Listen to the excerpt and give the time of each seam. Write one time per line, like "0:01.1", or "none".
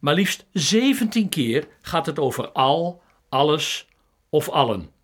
0:03.2